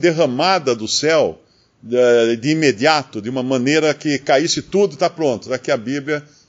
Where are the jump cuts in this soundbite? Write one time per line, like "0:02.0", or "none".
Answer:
none